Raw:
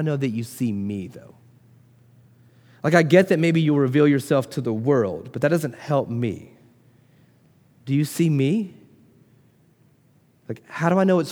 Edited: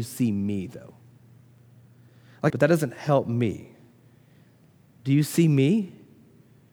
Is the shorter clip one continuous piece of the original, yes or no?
no